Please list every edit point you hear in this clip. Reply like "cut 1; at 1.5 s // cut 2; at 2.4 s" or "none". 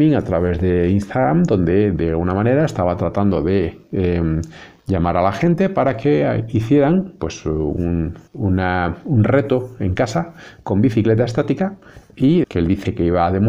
cut 1; at 8.3 s // cut 2; at 12.4 s